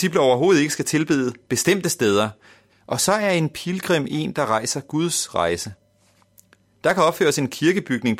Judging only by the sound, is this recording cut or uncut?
cut